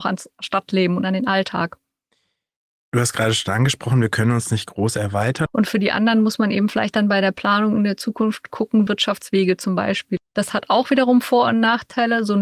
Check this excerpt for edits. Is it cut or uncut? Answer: cut